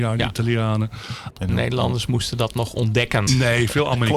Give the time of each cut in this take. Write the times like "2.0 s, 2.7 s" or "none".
1.3 s, 3.3 s